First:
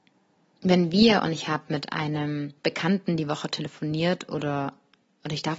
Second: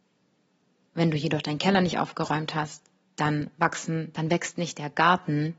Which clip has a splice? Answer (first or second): first